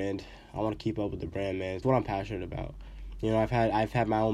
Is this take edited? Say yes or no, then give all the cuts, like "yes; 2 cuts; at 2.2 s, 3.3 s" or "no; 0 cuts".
yes; 1 cut; at 1.8 s